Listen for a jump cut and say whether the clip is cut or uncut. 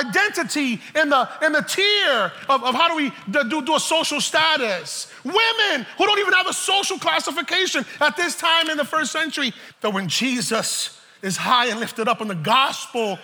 cut